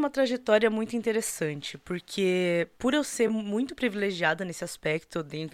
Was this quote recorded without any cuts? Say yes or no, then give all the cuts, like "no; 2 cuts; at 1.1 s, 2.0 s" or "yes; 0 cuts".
yes; 0 cuts